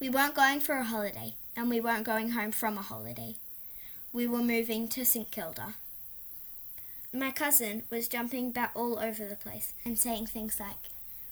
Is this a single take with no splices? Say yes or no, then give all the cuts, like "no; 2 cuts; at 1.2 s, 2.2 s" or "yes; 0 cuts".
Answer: no; 1 cut; at 7.1 s